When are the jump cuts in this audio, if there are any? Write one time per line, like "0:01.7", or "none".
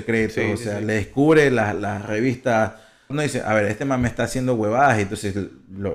0:03.1